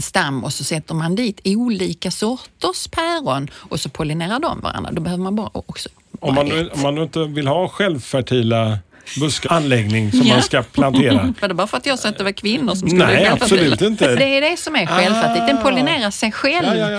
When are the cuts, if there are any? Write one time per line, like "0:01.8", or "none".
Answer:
0:09.4
0:11.4
0:14.1